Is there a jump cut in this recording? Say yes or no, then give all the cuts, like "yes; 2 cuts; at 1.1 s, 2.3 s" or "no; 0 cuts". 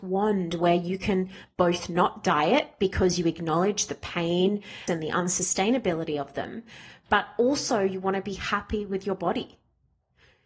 yes; 1 cut; at 4.9 s